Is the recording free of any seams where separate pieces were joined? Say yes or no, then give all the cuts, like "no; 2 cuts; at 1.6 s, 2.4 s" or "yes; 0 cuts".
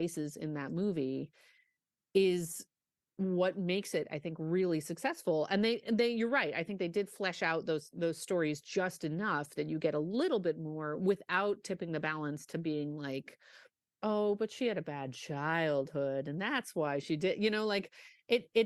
yes; 0 cuts